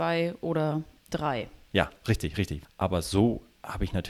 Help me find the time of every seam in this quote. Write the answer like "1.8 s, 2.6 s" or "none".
2.6 s